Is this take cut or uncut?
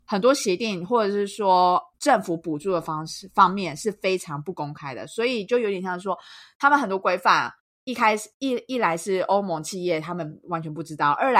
cut